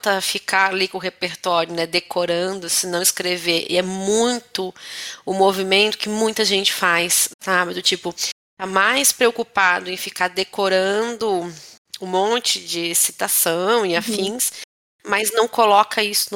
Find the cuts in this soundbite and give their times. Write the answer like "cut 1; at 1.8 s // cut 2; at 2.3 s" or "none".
none